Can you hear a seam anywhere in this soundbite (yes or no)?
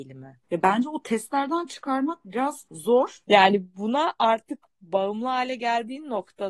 yes